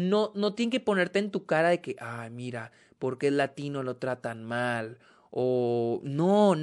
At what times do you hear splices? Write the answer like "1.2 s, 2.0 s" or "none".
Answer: none

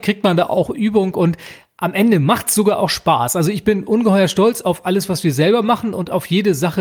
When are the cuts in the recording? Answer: none

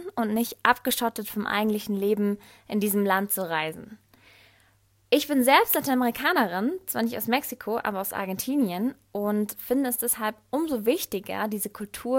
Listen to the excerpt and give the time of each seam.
none

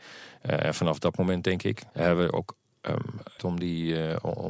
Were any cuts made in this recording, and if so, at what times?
1.9 s, 3.4 s

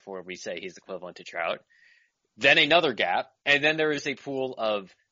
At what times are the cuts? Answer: 3.4 s

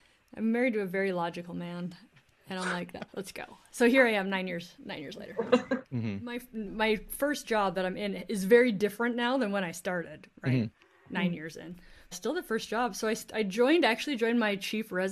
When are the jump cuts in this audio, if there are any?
3.1 s, 5.8 s, 12.1 s

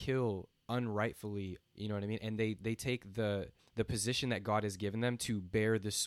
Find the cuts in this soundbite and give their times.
1.6 s, 3.6 s

